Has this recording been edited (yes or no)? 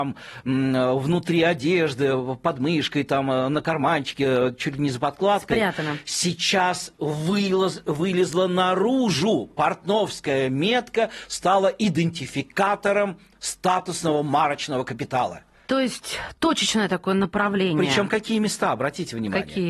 no